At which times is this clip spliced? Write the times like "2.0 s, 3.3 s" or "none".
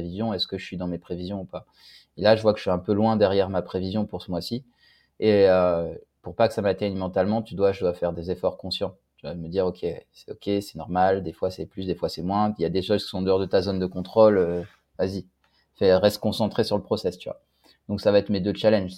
none